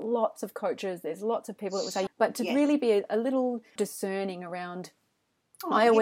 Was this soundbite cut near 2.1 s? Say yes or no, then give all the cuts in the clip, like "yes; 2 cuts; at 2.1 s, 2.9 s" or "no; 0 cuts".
yes; 2 cuts; at 2.1 s, 3.8 s